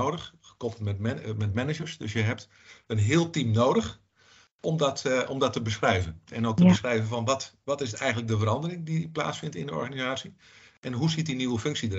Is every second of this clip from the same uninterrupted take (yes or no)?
yes